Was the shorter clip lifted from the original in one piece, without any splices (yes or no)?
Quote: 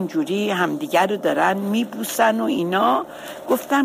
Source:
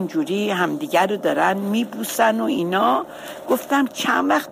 yes